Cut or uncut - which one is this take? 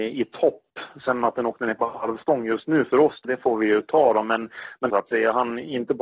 cut